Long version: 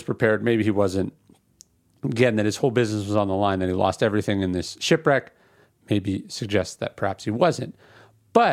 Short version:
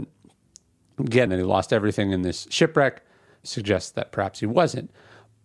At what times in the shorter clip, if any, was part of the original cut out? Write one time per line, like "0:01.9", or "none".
0:01.3
0:03.4